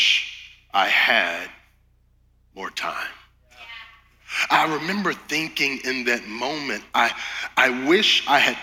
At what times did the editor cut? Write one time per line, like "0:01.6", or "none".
none